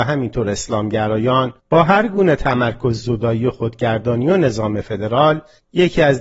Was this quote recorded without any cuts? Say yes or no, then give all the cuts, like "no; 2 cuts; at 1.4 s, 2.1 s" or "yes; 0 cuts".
no; 1 cut; at 1.6 s